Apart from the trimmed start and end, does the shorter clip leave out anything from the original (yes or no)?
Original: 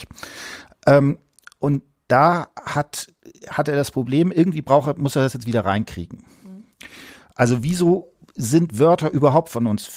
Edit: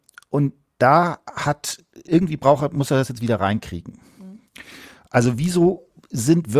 yes